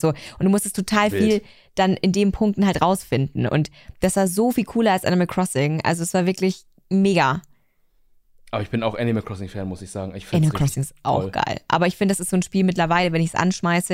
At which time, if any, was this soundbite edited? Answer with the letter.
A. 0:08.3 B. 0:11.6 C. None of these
C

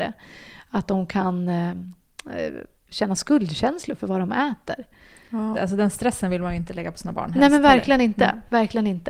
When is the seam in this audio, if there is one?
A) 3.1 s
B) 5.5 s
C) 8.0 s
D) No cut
B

